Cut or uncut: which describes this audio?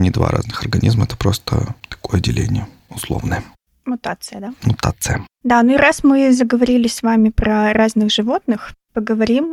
uncut